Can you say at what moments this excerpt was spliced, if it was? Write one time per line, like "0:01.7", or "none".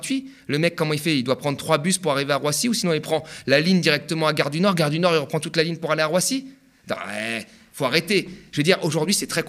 none